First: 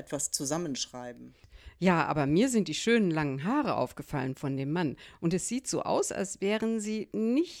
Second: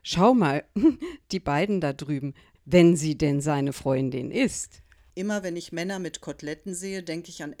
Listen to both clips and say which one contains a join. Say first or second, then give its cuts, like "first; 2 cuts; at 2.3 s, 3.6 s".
second; 2 cuts; at 2.6 s, 5.1 s